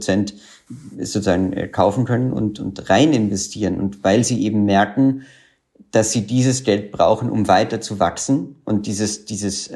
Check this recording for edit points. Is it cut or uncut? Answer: uncut